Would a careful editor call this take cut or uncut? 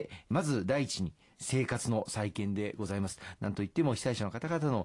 uncut